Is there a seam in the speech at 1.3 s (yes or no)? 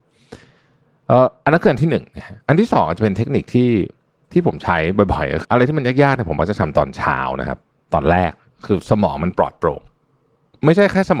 no